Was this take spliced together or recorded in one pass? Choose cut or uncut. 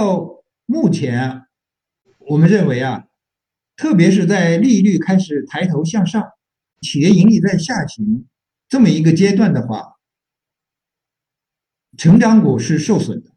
cut